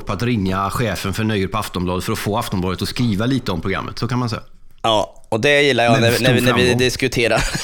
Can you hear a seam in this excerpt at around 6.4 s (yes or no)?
no